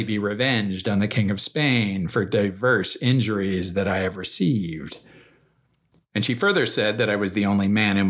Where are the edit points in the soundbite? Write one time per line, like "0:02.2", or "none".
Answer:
none